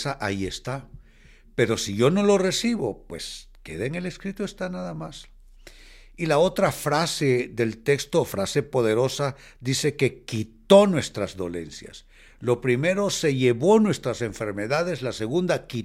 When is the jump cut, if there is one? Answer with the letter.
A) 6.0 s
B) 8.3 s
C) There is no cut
C